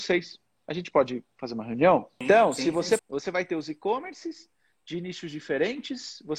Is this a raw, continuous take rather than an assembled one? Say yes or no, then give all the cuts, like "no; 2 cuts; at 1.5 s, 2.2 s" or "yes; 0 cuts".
no; 1 cut; at 3.0 s